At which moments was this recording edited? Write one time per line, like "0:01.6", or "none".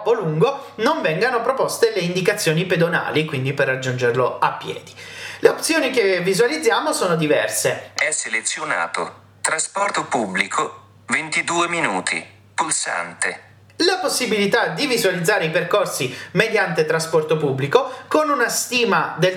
0:08.0

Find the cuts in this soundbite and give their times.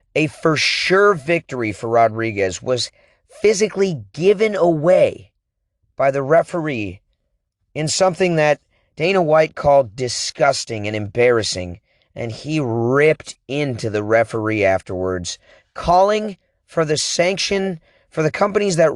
none

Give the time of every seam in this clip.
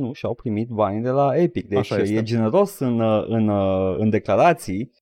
none

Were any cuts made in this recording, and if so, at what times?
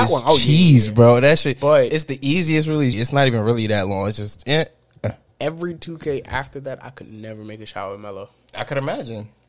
0:02.9

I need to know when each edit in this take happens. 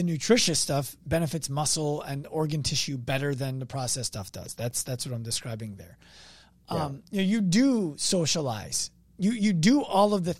none

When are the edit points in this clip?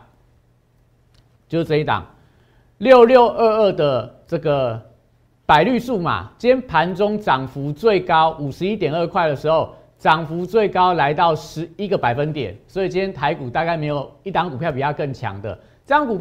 none

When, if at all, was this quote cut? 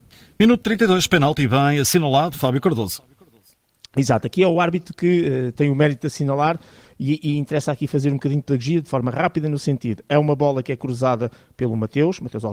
none

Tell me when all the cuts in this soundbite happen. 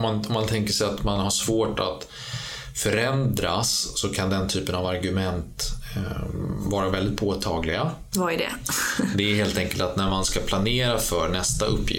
0:08.1

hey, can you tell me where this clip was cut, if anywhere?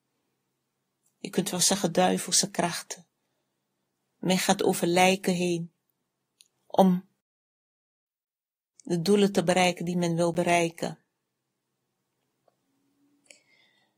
0:01.1
0:04.0
0:06.5

